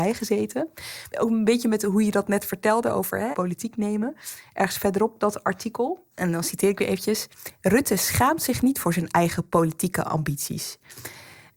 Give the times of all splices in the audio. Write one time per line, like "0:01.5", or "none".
0:03.3